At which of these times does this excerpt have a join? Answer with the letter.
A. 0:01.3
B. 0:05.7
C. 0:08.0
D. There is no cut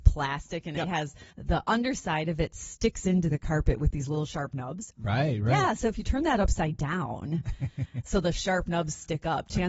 A